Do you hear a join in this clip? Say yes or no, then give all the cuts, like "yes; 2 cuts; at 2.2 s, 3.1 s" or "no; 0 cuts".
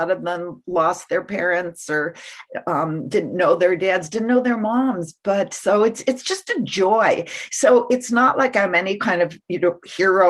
no; 0 cuts